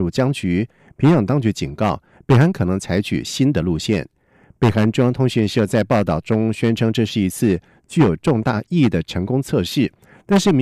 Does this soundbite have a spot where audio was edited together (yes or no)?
no